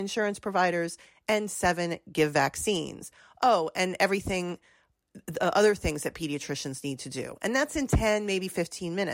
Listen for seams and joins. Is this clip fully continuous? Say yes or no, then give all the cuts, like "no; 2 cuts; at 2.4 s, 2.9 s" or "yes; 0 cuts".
yes; 0 cuts